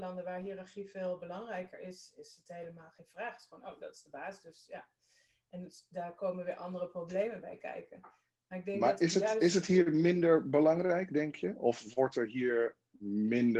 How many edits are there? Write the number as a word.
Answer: zero